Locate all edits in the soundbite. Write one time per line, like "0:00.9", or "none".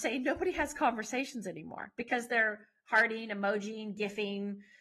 none